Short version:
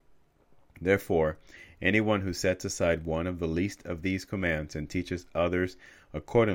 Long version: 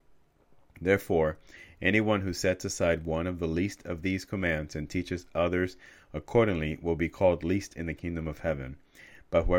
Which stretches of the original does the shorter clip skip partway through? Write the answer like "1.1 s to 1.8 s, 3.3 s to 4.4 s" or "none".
none